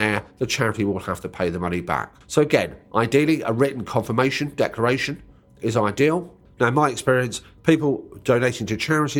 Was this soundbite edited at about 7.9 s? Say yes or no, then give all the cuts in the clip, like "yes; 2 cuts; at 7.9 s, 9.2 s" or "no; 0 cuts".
no; 2 cuts; at 2.2 s, 6.5 s